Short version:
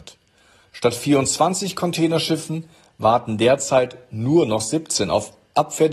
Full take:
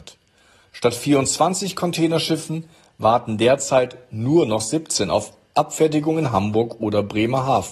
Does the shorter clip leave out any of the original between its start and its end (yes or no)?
no